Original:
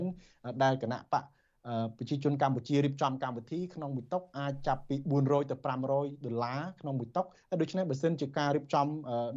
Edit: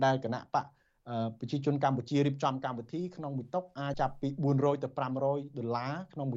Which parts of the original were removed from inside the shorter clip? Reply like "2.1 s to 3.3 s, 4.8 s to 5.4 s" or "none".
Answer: 4.5 s to 4.6 s